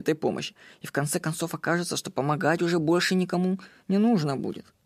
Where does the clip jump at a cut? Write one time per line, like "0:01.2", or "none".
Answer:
none